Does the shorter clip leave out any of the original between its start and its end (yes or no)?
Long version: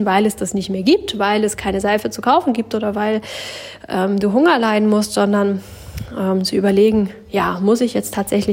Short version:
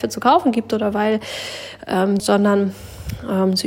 yes